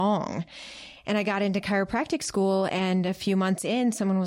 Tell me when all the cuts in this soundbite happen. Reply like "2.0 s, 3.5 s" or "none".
none